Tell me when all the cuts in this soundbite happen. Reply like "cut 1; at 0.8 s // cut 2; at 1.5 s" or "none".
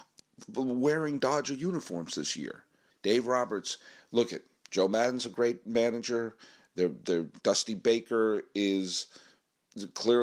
cut 1; at 2.9 s // cut 2; at 7.4 s